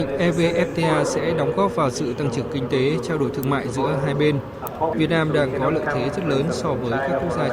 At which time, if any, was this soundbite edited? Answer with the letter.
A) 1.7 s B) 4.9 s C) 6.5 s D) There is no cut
B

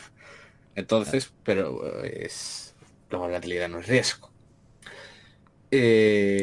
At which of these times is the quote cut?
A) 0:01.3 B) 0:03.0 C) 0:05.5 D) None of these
A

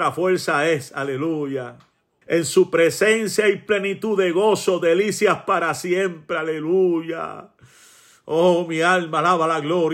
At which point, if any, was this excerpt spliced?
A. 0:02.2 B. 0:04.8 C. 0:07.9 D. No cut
A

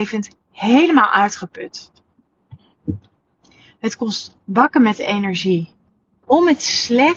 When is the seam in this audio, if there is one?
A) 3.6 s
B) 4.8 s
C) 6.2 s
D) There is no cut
C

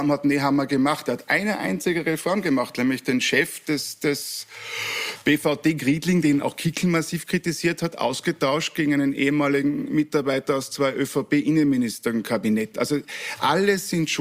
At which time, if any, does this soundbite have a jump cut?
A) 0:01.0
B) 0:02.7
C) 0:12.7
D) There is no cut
C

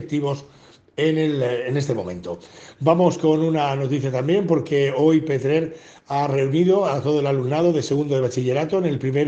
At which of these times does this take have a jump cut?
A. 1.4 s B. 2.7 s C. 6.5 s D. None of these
D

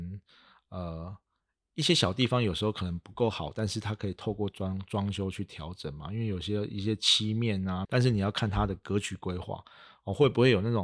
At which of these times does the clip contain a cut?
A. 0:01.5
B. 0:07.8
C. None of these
B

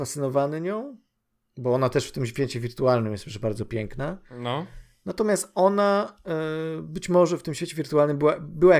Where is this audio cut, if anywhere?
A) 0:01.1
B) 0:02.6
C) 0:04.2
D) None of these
D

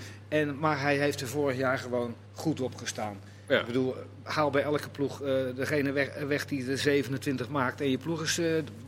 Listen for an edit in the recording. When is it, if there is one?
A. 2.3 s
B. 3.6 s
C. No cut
A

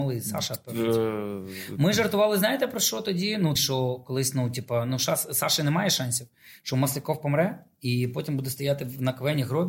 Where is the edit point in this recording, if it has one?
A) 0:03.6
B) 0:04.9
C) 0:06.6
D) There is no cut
A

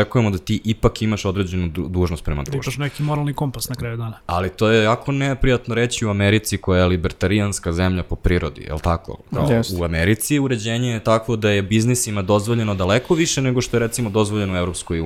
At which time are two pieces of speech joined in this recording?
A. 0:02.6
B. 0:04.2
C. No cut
B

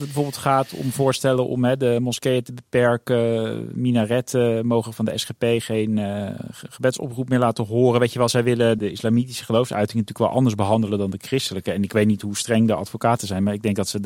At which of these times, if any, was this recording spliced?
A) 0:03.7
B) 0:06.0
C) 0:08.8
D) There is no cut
C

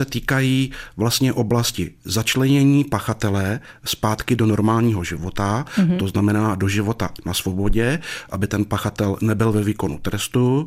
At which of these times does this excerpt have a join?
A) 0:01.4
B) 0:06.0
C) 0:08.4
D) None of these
D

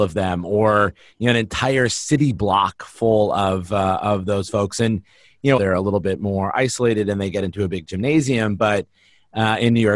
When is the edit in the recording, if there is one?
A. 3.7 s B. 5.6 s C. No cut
B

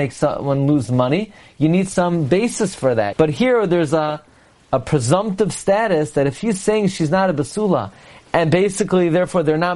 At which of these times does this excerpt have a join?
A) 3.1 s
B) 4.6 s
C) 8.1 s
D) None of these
A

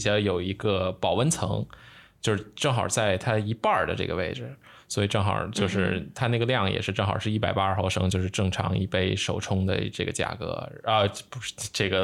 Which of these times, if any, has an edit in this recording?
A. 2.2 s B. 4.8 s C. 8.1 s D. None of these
D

